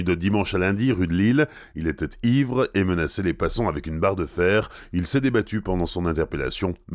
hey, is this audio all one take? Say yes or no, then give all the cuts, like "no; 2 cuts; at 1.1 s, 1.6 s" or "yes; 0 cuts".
yes; 0 cuts